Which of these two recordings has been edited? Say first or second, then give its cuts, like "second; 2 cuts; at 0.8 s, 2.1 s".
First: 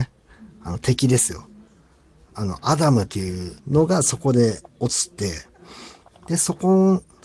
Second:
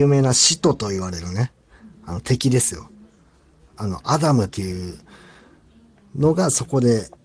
first; 1 cut; at 3.6 s